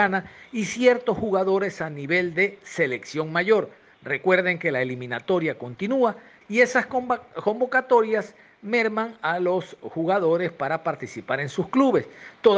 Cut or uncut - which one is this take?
cut